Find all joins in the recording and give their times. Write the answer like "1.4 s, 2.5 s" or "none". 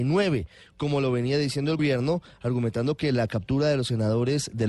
1.8 s